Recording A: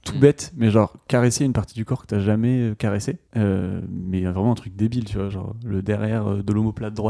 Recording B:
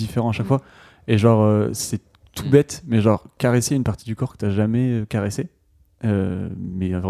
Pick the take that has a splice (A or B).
A